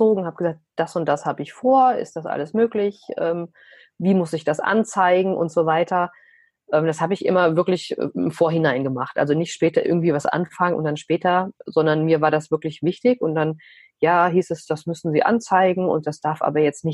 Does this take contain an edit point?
no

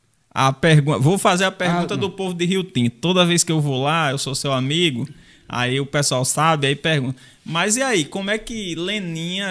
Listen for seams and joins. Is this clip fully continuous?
yes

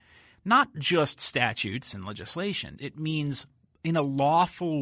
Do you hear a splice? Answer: yes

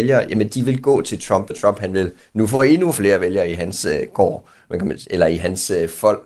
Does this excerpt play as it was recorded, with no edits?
no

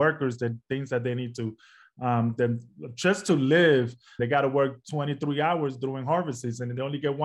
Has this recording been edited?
yes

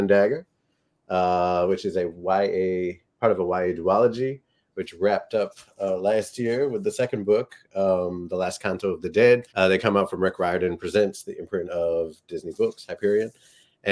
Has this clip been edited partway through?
yes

